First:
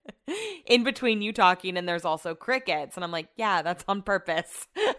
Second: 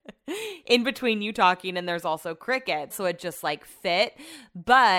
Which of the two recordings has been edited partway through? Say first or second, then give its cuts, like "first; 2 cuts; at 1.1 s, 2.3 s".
second; 1 cut; at 2.9 s